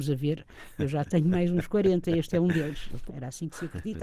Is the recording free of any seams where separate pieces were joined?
no; 1 cut; at 3.1 s

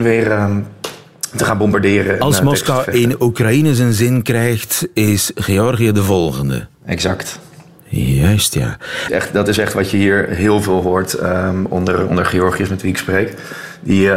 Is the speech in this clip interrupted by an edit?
yes; 2 cuts; at 6.7 s, 9.1 s

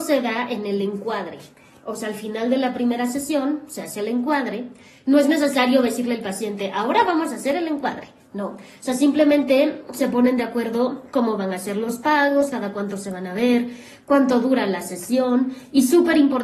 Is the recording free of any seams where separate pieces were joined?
yes; 0 cuts

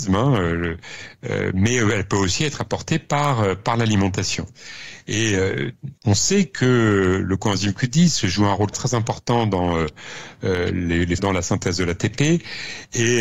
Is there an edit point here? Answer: yes; 3 cuts; at 6.0 s, 8.7 s, 11.2 s

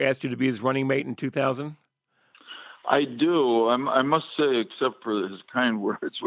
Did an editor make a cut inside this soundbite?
no; 0 cuts

